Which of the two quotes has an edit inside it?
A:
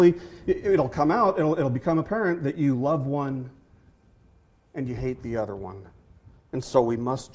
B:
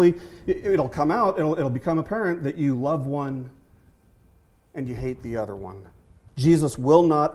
B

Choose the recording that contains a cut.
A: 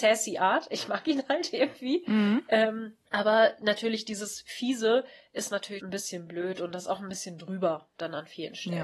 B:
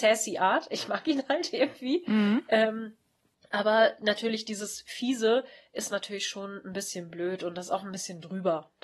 A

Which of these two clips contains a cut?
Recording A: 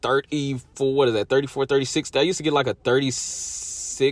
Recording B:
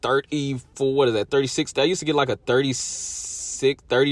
B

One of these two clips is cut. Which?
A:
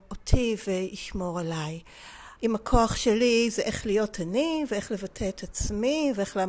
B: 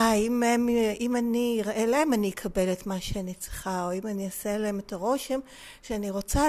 A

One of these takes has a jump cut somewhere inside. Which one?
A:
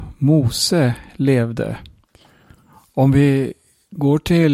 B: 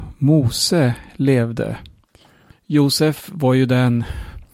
B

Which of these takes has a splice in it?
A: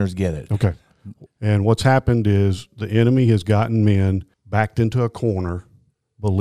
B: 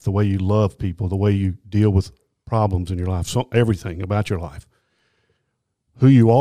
A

